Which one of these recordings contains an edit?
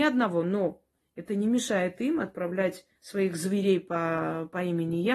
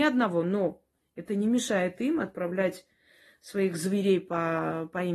first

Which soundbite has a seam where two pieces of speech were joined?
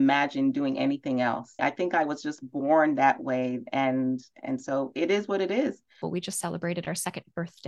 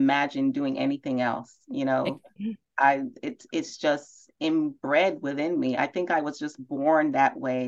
first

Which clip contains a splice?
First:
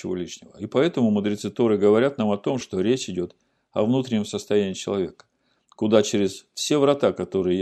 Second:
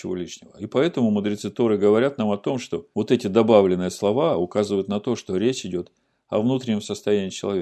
first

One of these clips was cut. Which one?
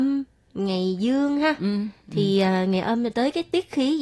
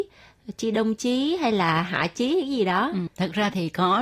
second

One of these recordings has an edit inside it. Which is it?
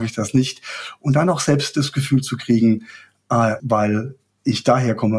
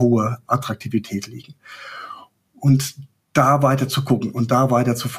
first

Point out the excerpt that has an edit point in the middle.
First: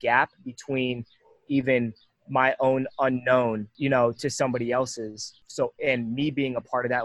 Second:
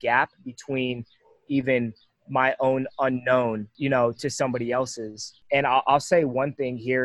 first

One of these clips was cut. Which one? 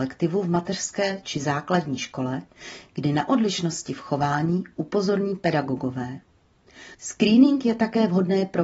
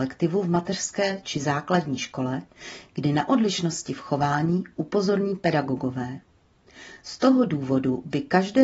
first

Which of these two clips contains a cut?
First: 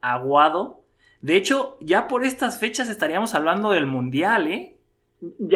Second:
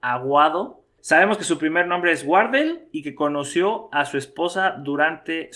second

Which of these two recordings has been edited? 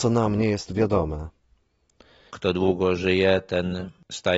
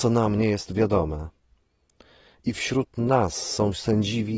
first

